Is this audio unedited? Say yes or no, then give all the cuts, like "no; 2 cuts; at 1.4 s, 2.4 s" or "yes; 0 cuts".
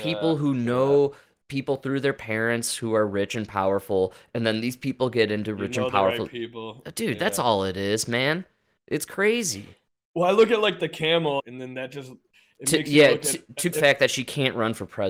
no; 2 cuts; at 11.4 s, 13.7 s